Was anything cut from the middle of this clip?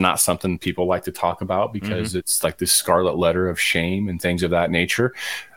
no; 0 cuts

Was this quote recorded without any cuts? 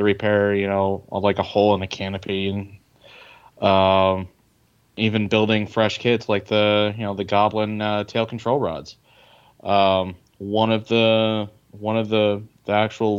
yes; 0 cuts

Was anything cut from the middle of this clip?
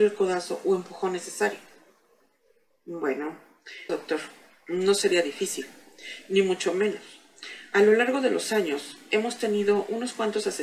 yes; 1 cut; at 3.9 s

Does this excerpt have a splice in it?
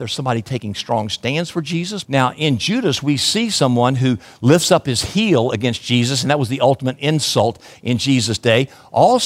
yes; 1 cut; at 2.0 s

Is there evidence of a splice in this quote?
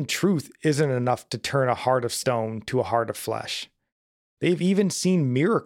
yes; 1 cut; at 4.2 s

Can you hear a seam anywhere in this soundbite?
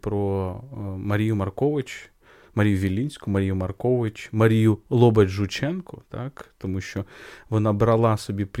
no; 0 cuts

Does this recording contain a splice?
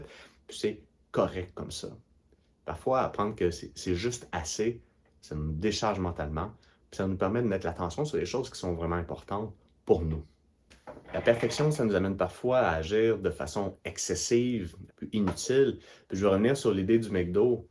yes; 2 cuts; at 5.2 s, 14.9 s

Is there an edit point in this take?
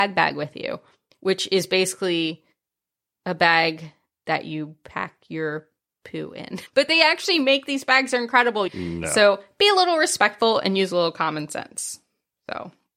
yes; 2 cuts; at 6.7 s, 8.7 s

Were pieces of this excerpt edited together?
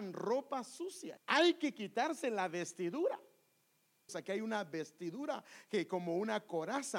yes; 2 cuts; at 1.2 s, 4.1 s

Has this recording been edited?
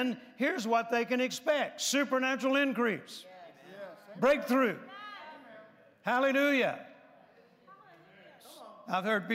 no; 0 cuts

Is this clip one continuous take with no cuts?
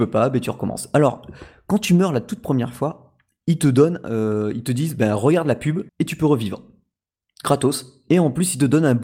no; 1 cut; at 5.9 s

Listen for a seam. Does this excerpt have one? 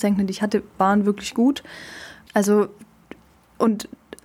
yes; 1 cut; at 2.3 s

